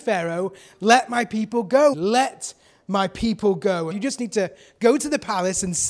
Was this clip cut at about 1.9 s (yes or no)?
yes